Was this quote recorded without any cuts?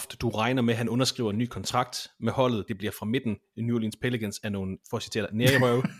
no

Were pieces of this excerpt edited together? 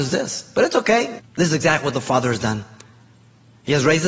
yes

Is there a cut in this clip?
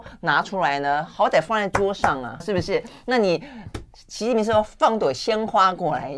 yes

